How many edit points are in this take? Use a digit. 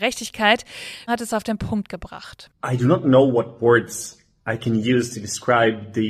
1